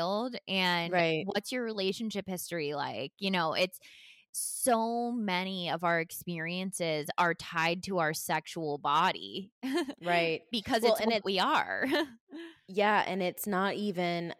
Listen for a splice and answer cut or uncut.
uncut